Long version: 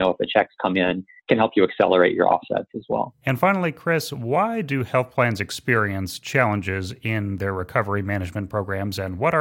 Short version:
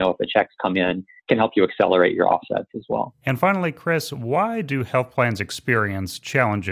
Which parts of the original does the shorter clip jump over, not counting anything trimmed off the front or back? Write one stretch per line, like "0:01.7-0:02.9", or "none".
none